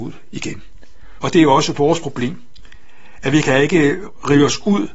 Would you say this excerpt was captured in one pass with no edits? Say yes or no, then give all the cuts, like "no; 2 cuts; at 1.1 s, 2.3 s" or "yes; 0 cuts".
no; 1 cut; at 1.2 s